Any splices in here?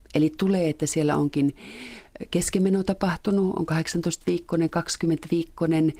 no; 0 cuts

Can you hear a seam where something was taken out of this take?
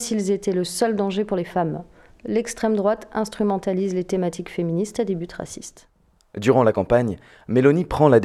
no; 0 cuts

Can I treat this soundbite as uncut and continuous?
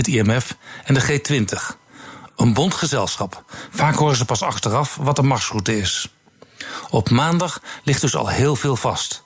no; 1 cut; at 3.7 s

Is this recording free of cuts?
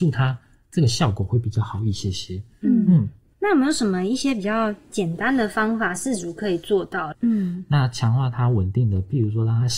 no; 1 cut; at 7.1 s

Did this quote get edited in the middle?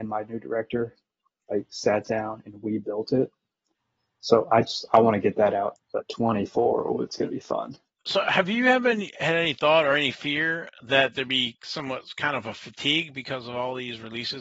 yes; 1 cut; at 5.8 s

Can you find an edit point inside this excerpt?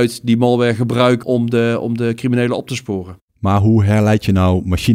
yes; 1 cut; at 1.2 s

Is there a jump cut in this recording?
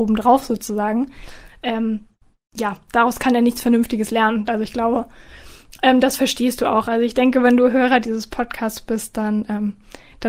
yes; 1 cut; at 4.5 s

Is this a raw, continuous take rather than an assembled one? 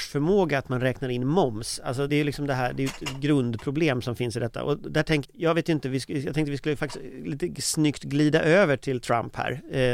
no; 2 cuts; at 2.1 s, 5.2 s

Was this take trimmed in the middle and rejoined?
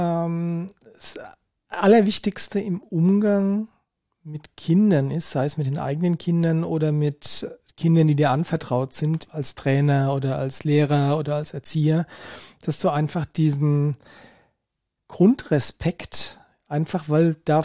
yes; 1 cut; at 9.2 s

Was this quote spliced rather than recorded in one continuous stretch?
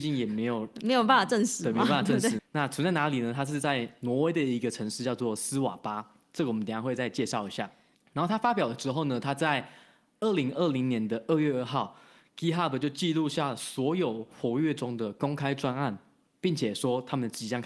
yes; 1 cut; at 2.4 s

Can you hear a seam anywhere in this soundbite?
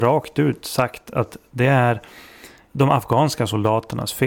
yes; 1 cut; at 2.7 s

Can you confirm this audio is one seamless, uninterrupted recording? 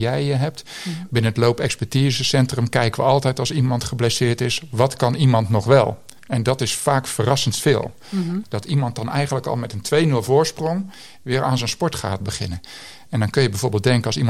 no; 2 cuts; at 8.4 s, 12.2 s

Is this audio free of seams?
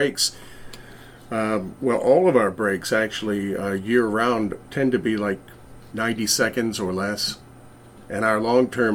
yes; 0 cuts

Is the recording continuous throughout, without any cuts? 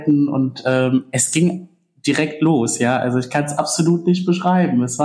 yes; 0 cuts

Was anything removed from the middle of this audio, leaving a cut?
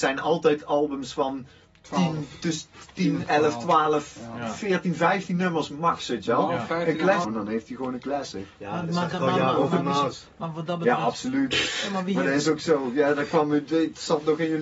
yes; 1 cut; at 7.2 s

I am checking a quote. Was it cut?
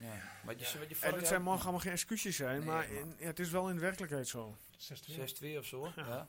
yes; 1 cut; at 4.7 s

